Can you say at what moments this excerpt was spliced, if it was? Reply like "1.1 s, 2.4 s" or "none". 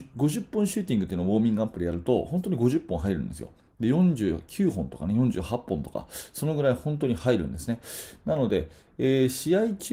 none